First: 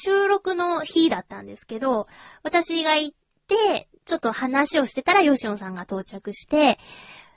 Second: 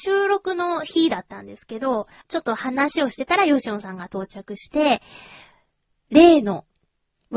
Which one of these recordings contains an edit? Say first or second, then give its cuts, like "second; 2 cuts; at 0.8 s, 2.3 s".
second; 1 cut; at 2.2 s